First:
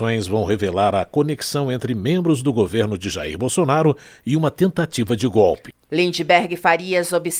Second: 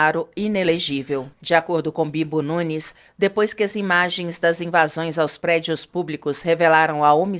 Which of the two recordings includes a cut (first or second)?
second